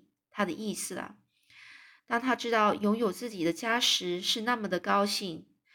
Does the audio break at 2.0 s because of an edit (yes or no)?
yes